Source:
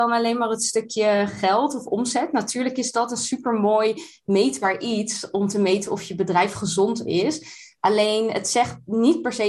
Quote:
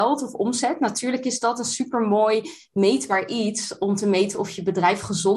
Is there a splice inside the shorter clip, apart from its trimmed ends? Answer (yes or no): no